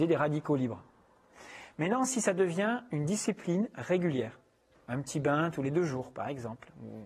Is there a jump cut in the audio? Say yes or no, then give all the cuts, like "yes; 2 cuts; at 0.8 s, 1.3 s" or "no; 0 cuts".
yes; 1 cut; at 4.7 s